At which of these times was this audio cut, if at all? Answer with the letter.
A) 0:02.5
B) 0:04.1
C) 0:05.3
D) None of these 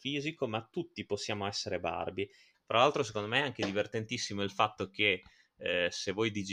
A